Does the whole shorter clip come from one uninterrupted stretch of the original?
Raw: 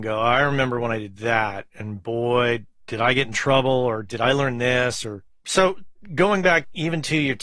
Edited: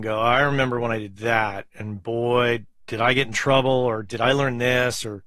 yes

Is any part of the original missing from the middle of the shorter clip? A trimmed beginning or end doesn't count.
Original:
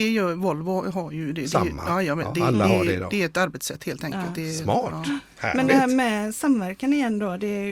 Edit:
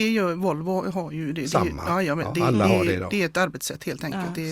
no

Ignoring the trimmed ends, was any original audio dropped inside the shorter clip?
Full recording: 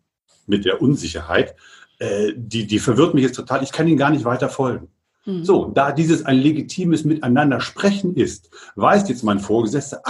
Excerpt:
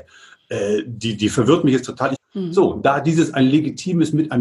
yes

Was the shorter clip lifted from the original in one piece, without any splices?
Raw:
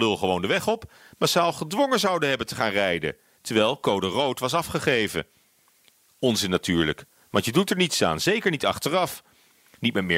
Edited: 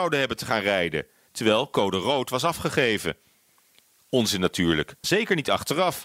no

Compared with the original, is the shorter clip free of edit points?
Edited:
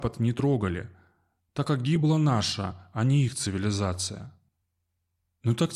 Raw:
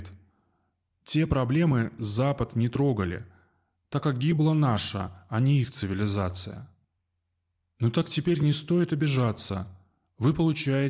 yes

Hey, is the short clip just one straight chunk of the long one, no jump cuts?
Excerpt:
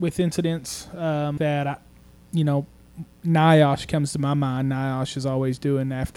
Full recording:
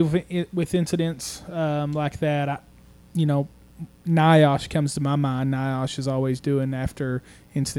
no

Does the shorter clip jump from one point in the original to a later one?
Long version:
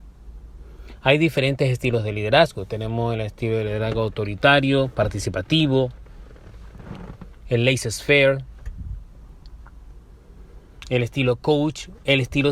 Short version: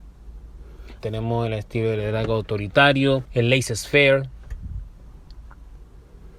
yes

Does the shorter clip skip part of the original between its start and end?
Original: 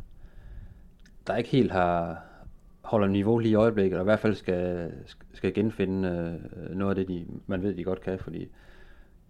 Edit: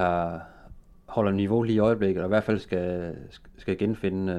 no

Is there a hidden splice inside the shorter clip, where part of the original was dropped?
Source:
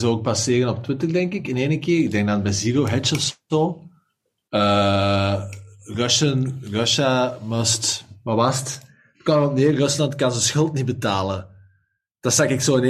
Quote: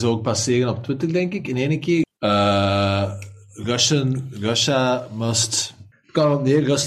yes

